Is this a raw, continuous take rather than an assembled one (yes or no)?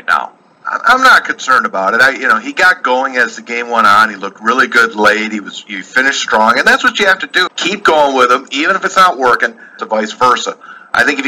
no